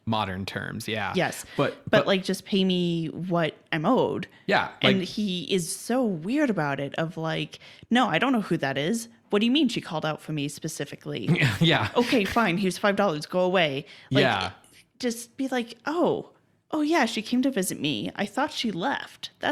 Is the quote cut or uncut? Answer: uncut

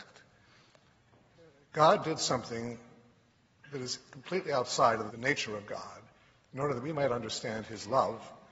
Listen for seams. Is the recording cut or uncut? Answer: cut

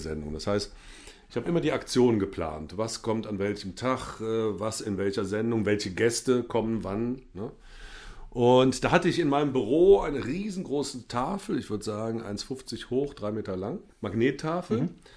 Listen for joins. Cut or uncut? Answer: cut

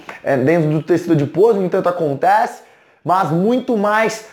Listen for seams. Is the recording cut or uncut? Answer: uncut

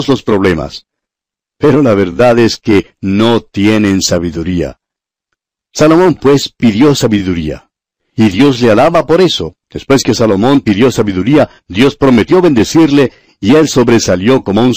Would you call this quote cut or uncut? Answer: uncut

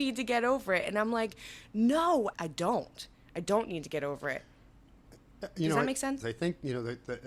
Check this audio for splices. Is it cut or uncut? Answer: cut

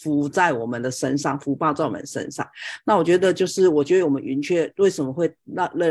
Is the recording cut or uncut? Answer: uncut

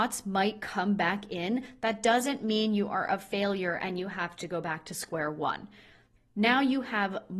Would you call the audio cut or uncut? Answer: cut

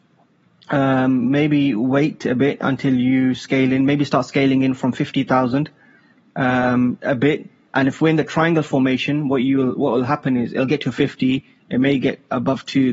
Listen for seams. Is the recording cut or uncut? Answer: uncut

